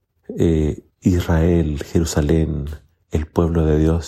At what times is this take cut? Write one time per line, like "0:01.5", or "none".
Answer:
0:00.9